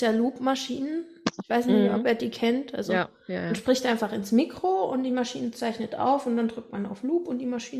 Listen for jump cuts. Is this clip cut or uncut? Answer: uncut